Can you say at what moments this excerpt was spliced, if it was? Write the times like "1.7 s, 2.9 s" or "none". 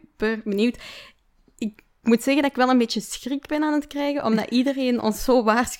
none